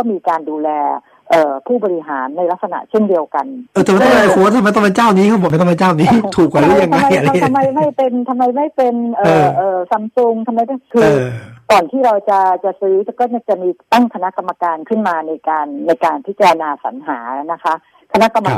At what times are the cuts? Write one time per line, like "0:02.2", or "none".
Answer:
none